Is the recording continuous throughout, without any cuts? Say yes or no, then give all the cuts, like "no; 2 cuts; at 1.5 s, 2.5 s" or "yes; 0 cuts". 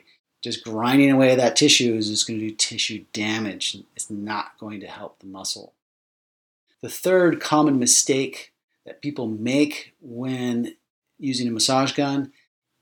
no; 1 cut; at 6.7 s